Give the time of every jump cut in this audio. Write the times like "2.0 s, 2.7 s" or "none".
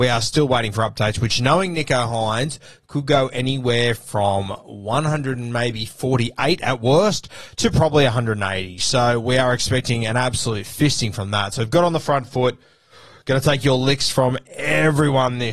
none